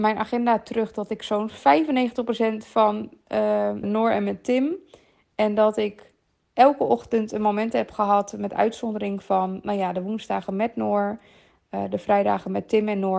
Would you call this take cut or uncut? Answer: cut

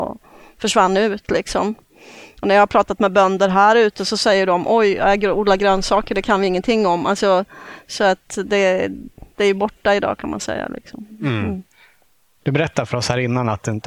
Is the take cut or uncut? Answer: uncut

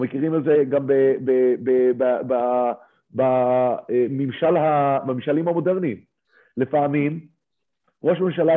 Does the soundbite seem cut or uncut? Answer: uncut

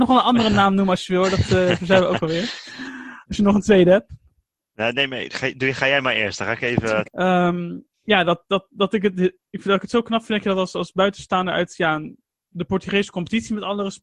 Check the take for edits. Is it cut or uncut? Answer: cut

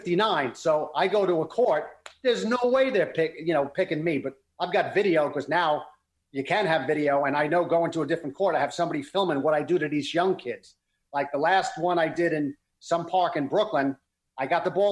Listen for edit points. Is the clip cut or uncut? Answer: uncut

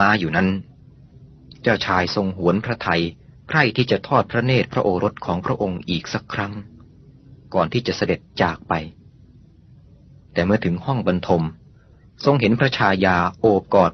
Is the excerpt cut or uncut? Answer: uncut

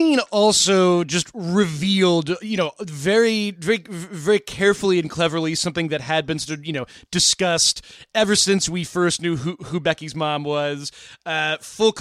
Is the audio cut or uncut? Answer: uncut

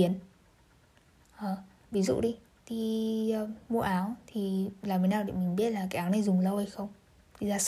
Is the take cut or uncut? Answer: cut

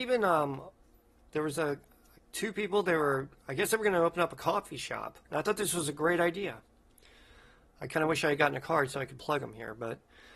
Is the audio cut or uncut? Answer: cut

